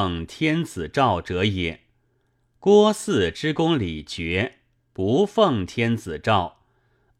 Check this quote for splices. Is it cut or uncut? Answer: uncut